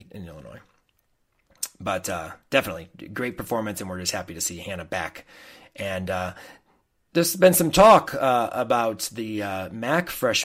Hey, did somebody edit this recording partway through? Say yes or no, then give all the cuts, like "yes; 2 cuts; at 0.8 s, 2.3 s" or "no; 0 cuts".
no; 0 cuts